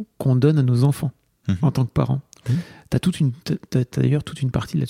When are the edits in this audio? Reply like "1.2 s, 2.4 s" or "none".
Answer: none